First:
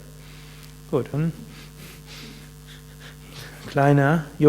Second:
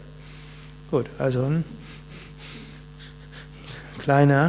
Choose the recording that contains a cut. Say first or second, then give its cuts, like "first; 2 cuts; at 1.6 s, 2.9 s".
first; 1 cut; at 1.1 s